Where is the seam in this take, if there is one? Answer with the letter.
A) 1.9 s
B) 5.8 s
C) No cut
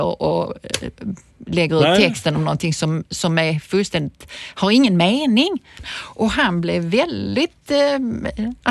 B